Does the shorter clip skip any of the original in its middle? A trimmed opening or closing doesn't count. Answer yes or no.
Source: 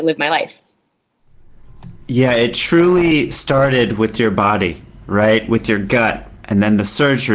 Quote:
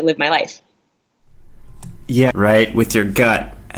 yes